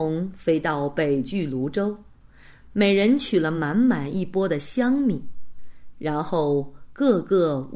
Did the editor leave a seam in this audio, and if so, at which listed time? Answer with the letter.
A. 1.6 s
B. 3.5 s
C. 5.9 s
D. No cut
D